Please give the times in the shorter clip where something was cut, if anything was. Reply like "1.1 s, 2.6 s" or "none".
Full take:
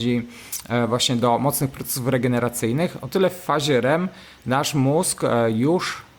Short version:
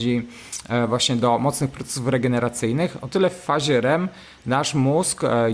none